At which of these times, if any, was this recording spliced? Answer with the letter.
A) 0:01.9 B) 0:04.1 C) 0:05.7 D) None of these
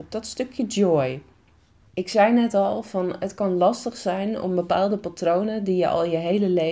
A